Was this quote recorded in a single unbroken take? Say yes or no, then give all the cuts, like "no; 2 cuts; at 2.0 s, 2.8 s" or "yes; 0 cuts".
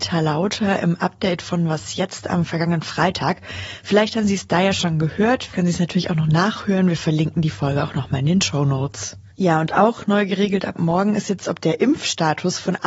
no; 1 cut; at 5.5 s